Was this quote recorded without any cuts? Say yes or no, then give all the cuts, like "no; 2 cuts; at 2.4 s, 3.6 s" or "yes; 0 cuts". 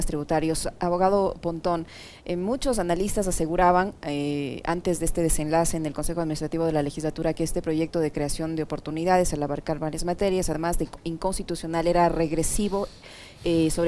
yes; 0 cuts